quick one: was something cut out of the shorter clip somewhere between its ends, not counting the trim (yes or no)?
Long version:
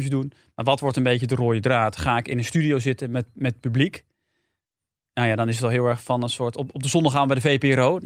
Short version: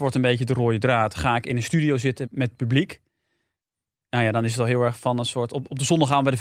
yes